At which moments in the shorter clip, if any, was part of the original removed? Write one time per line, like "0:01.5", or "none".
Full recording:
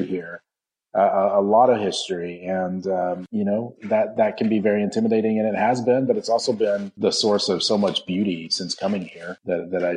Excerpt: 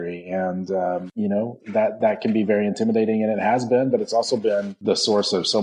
none